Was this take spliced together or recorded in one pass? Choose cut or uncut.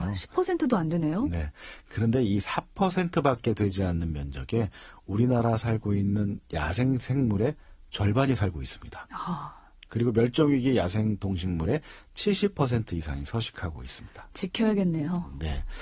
uncut